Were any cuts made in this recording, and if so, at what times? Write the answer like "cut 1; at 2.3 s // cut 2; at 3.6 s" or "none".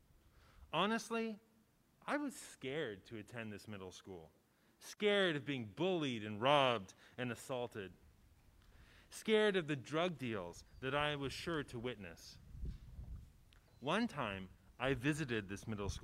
none